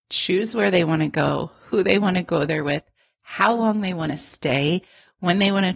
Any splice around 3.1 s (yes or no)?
no